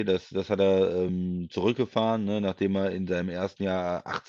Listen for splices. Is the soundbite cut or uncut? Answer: uncut